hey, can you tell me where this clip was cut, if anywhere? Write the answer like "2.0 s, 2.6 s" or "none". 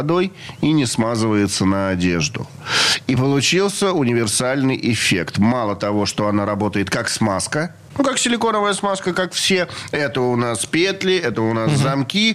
none